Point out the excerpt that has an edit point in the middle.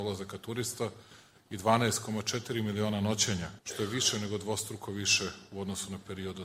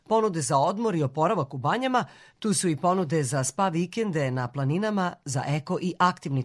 first; 1 cut; at 3.6 s

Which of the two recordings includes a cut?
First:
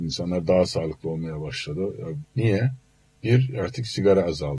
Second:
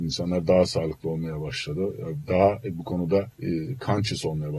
first; 1 cut; at 2.2 s

